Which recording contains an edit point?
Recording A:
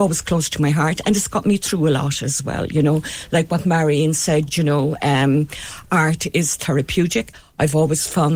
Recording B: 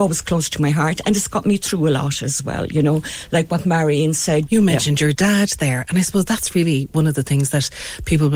B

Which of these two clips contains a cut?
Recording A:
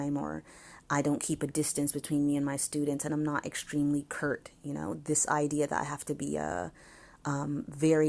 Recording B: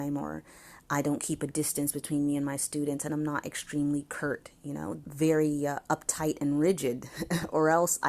B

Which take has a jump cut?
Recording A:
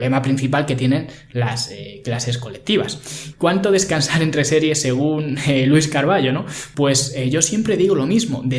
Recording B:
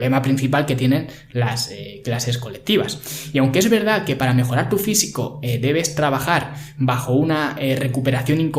A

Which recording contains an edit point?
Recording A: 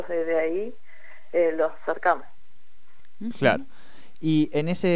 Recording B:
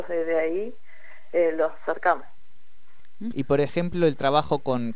B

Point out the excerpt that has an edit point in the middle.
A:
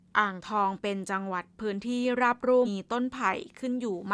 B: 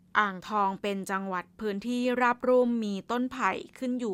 A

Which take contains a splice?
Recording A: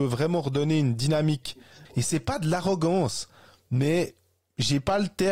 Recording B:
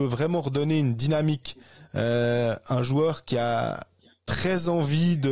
A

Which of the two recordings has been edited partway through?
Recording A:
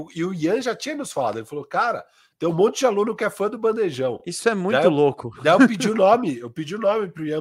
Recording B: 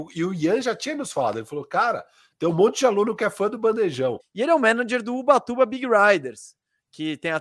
B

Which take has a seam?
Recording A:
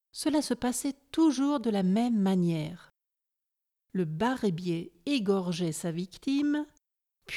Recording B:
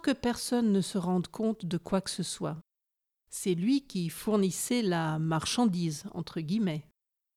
B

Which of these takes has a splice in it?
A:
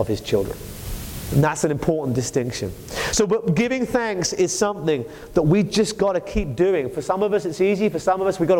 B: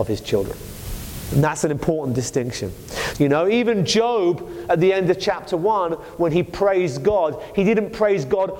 B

